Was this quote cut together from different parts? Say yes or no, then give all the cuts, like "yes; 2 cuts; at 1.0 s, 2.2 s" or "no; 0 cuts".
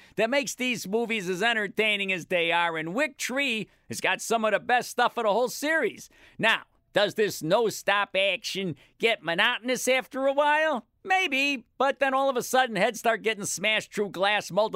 no; 0 cuts